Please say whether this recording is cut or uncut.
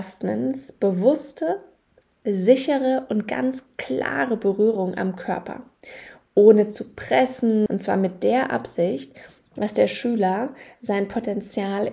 cut